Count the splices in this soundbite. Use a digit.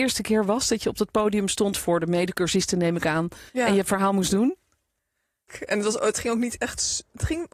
2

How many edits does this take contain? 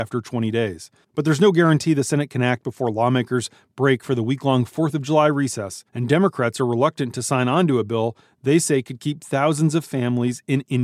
2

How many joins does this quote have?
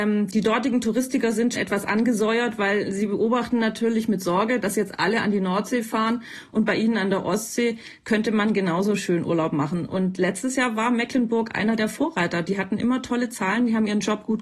1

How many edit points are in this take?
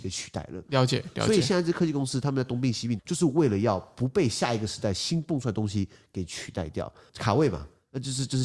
2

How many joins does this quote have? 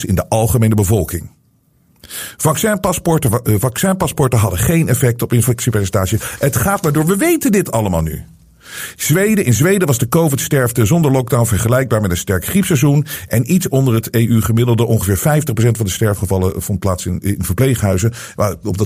2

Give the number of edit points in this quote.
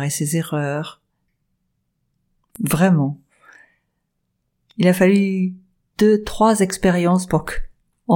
1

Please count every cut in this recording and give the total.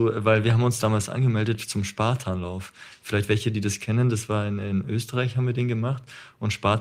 0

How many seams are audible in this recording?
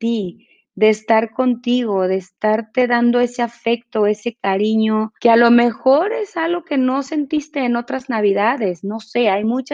1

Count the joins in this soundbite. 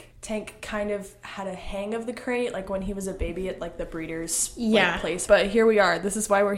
1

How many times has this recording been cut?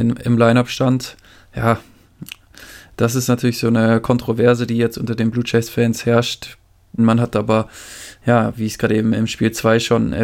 1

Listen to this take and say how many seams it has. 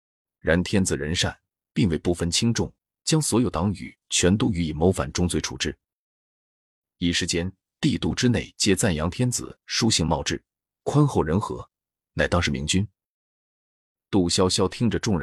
0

